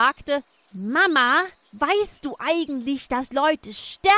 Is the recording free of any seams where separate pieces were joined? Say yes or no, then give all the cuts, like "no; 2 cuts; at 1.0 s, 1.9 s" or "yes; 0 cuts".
yes; 0 cuts